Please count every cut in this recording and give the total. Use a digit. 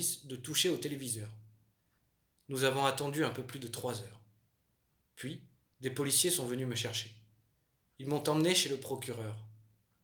0